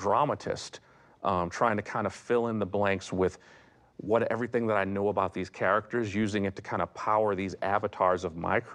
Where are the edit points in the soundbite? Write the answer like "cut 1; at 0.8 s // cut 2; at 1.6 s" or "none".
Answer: none